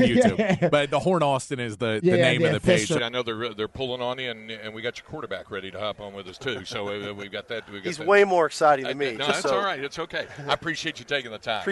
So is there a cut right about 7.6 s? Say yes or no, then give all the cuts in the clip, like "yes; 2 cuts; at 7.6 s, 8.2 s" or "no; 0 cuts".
no; 1 cut; at 3.0 s